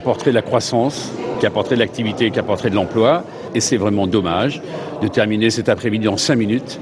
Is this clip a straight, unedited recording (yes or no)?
yes